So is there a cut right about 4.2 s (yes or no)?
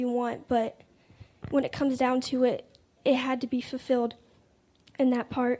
no